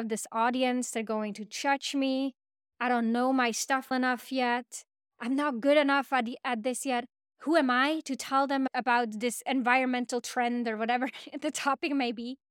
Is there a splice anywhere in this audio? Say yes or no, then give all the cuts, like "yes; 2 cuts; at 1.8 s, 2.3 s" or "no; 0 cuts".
yes; 1 cut; at 3.9 s